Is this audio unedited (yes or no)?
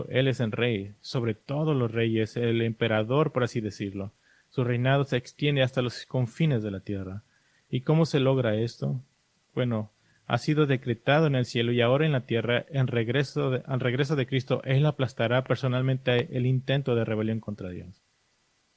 yes